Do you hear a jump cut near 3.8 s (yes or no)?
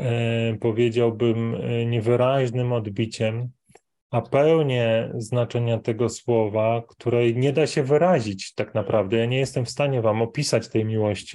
no